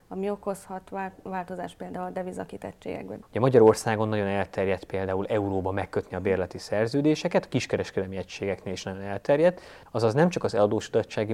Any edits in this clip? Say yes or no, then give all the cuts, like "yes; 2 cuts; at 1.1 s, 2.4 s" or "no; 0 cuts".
yes; 2 cuts; at 3.2 s, 9.9 s